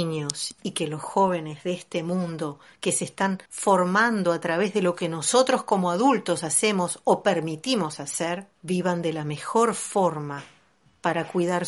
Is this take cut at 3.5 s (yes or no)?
yes